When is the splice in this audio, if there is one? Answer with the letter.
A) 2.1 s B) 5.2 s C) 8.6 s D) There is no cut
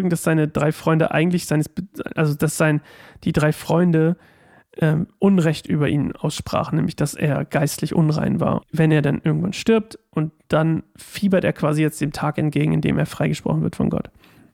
C